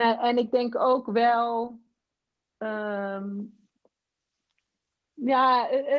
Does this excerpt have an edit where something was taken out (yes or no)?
no